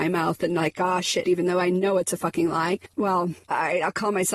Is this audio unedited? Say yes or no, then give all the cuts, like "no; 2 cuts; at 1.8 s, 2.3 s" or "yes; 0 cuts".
no; 2 cuts; at 1.2 s, 2.9 s